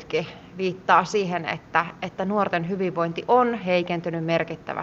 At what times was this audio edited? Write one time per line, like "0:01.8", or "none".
none